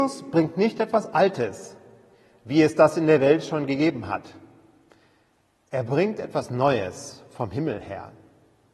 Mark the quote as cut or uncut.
uncut